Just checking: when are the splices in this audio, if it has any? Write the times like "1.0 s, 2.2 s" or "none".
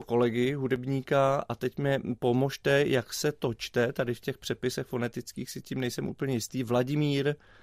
none